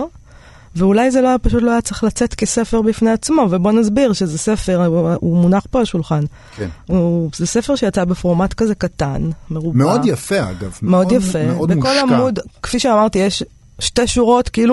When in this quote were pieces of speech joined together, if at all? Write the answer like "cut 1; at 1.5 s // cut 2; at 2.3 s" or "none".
cut 1; at 5.2 s